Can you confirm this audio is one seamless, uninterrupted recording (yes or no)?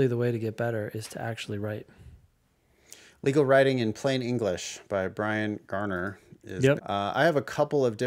no